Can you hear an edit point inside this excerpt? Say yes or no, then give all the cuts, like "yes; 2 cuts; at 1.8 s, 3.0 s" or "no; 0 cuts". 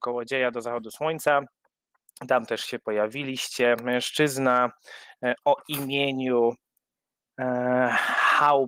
no; 0 cuts